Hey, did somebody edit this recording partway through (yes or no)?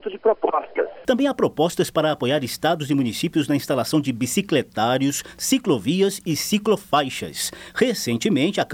yes